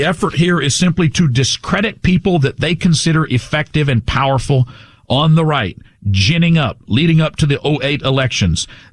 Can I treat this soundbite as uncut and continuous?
yes; 0 cuts

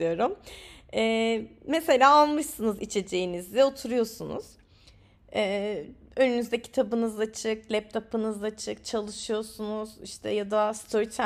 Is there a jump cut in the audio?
no; 0 cuts

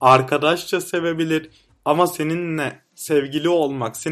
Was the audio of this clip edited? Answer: yes; 1 cut; at 1.7 s

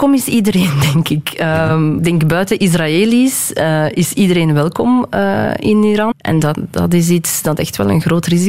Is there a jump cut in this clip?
yes; 2 cuts; at 2.0 s, 6.1 s

